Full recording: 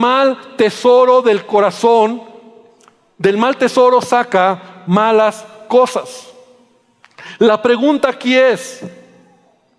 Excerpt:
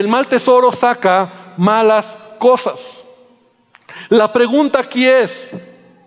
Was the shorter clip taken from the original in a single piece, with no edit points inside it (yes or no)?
yes